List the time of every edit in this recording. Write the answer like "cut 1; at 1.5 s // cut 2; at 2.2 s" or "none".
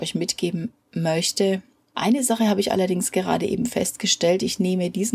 cut 1; at 1.9 s